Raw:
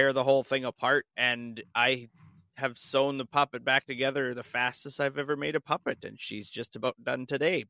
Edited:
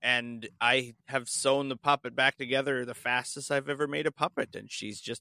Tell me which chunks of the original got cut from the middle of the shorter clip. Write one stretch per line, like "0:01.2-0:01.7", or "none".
0:02.1-0:02.5